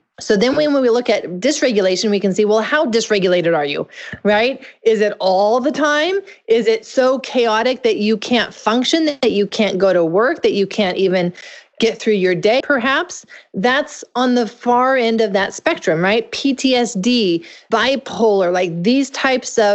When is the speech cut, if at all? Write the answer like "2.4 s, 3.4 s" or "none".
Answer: 12.6 s

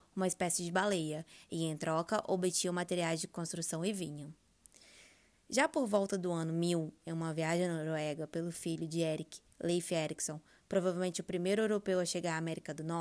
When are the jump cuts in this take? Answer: none

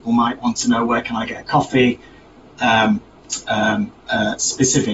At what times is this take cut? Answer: none

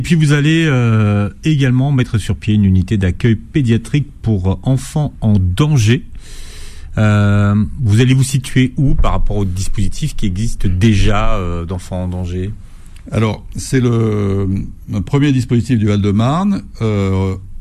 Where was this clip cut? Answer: none

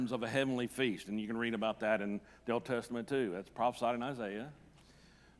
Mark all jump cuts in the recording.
none

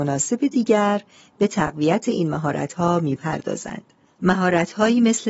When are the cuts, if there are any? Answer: 4.1 s

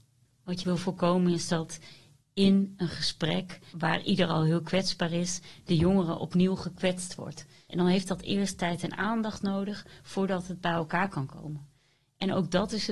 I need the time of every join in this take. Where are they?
3.7 s, 7.7 s

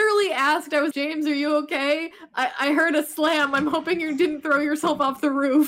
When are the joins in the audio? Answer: 0.9 s

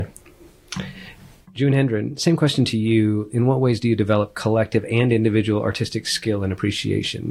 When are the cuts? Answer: none

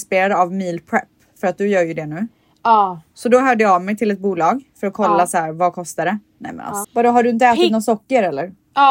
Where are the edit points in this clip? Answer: 6.8 s

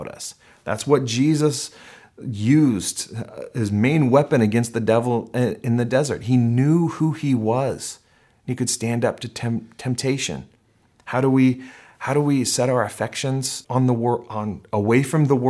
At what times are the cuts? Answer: 13.6 s

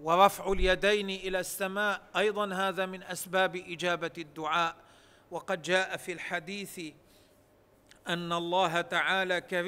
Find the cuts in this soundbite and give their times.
none

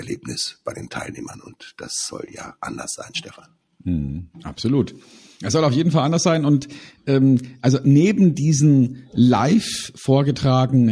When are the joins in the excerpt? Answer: none

